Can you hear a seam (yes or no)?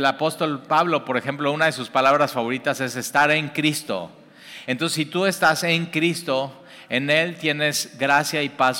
no